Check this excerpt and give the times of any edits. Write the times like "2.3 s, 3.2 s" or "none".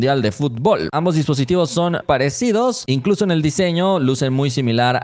0.9 s, 2.0 s